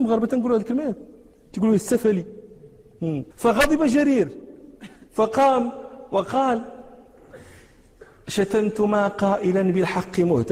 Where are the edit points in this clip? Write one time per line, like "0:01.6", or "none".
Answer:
0:03.3